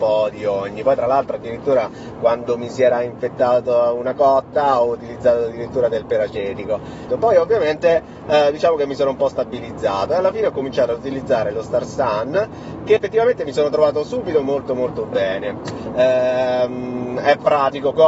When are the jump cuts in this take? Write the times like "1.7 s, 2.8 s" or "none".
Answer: 7.1 s, 13.0 s